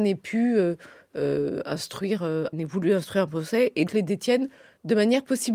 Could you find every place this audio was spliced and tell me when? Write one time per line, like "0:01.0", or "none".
0:02.5
0:03.9